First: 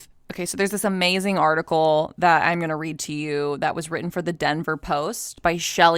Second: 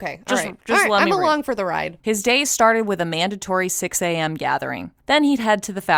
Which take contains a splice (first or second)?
second